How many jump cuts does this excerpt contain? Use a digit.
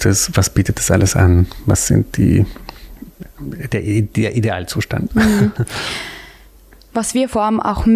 0